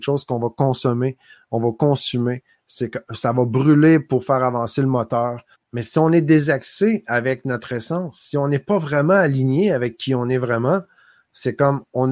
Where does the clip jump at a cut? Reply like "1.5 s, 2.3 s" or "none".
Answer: 5.5 s